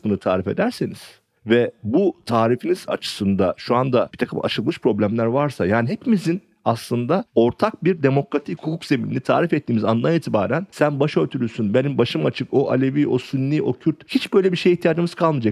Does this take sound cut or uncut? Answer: cut